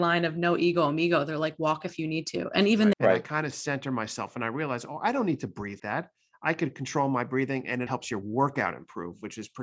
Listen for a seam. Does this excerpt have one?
yes; 3 cuts; at 2.9 s, 5.8 s, 7.9 s

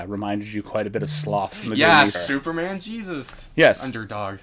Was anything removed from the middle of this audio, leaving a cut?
yes; 1 cut; at 2.1 s

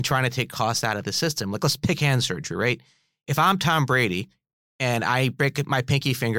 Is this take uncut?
yes; 0 cuts

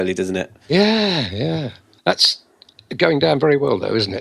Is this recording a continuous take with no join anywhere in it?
no; 1 cut; at 2.0 s

